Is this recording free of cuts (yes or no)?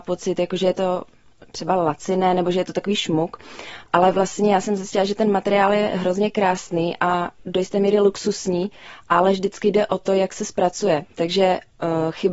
yes